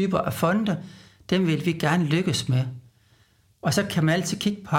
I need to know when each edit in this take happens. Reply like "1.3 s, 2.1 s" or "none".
3.4 s